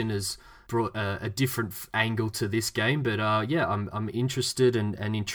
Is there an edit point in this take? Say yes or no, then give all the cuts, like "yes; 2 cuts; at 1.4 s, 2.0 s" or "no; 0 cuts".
no; 0 cuts